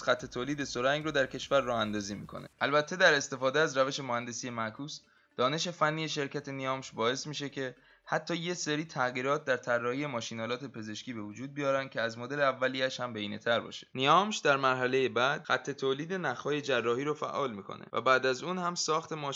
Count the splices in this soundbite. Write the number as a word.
one